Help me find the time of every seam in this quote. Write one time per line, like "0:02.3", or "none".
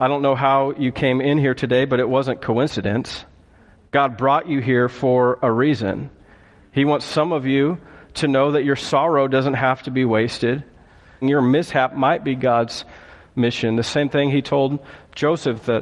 0:11.2